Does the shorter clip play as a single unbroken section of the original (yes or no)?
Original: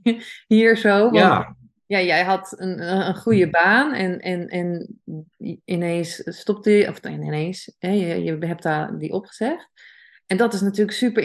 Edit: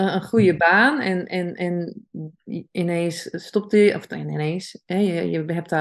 yes